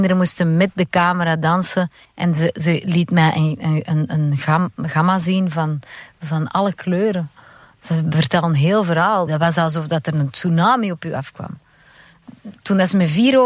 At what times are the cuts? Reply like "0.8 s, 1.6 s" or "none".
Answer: 2.0 s, 9.3 s